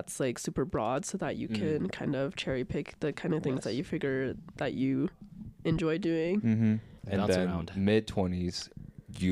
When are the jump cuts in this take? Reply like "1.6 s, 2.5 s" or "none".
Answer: 7.0 s